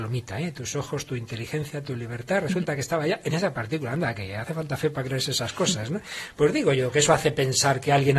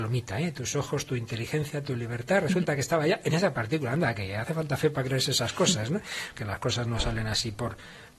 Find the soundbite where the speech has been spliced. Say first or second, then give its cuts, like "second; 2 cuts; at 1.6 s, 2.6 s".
second; 1 cut; at 6.3 s